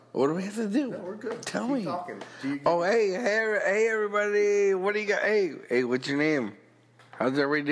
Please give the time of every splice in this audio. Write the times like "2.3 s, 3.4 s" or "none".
none